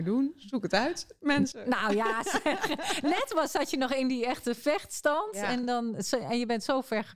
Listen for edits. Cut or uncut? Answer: uncut